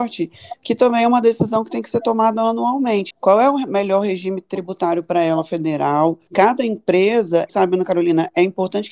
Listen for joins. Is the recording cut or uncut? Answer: cut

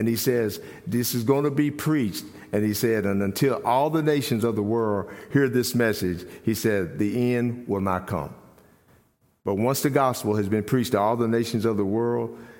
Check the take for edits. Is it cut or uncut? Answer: uncut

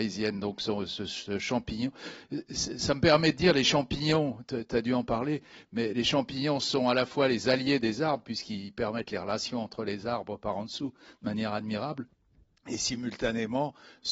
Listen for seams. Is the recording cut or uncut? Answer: uncut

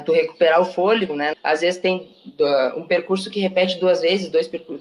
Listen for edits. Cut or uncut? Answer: cut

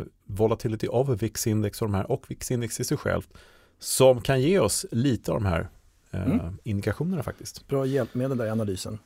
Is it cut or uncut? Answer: uncut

